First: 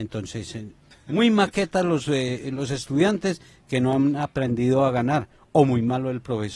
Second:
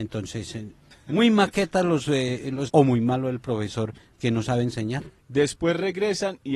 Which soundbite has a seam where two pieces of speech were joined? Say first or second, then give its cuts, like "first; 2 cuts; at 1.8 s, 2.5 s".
second; 2 cuts; at 2.7 s, 5.2 s